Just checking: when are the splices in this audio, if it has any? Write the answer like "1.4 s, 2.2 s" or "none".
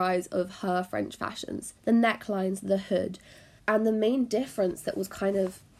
1.8 s, 3.6 s